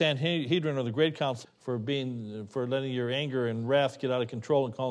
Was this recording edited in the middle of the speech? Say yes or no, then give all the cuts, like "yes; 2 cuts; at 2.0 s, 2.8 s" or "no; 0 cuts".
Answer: yes; 1 cut; at 1.4 s